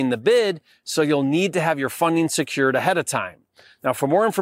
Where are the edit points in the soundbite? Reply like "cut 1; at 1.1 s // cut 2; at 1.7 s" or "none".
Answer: none